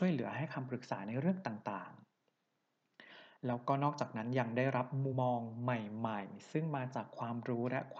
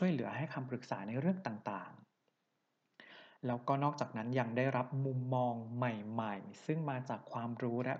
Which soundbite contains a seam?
first; 1 cut; at 5.1 s

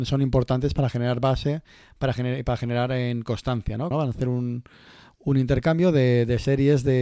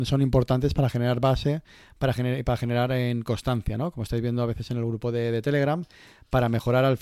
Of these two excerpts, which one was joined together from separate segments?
first; 1 cut; at 3.9 s

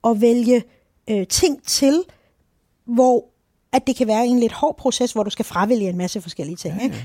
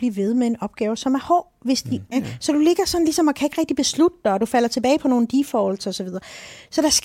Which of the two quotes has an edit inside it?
second; 1 cut; at 2.1 s

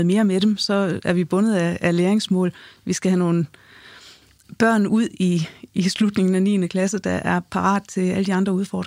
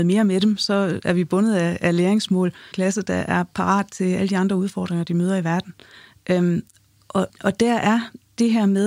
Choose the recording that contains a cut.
second; 2 cuts; at 2.7 s, 7.3 s

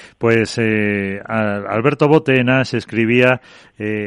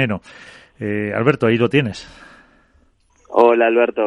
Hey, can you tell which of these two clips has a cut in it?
second; 1 cut; at 3.1 s

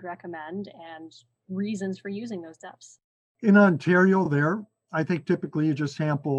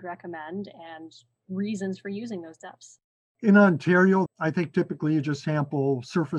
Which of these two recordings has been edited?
second; 1 cut; at 4.3 s

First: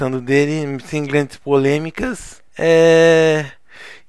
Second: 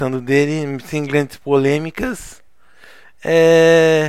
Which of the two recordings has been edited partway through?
first; 1 cut; at 2.5 s

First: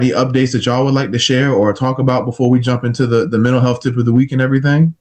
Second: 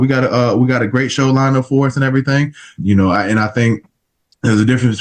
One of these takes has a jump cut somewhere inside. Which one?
second; 1 cut; at 2.8 s

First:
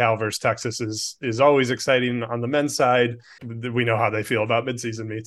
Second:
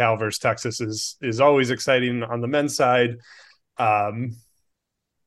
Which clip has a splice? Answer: first; 1 cut; at 3.4 s

